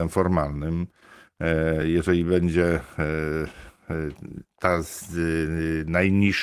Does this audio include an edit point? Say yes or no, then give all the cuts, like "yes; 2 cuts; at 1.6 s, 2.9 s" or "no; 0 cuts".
no; 0 cuts